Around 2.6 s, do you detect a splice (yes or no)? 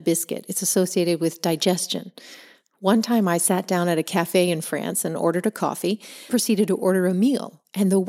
no